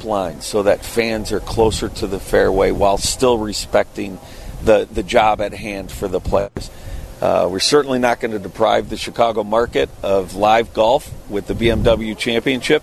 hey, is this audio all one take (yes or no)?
no